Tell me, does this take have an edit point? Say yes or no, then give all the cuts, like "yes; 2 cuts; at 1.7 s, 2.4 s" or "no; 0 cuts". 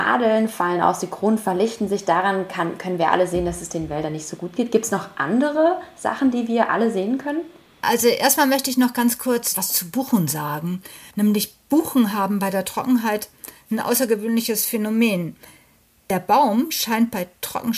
no; 0 cuts